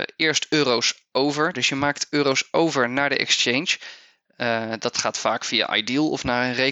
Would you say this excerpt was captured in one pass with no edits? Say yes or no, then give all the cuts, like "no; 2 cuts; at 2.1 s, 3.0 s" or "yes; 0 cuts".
no; 1 cut; at 1.5 s